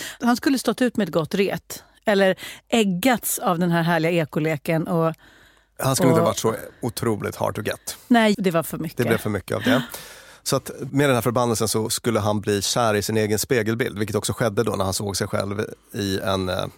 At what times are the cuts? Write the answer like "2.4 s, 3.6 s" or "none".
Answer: 8.3 s